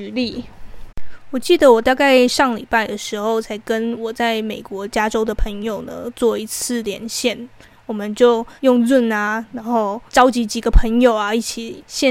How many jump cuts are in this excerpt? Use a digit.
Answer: 2